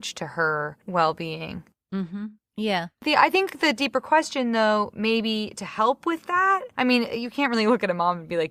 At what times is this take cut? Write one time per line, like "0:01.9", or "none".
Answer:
none